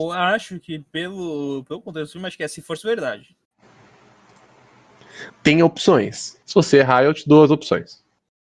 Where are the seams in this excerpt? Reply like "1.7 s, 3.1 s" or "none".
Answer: 5.3 s, 6.4 s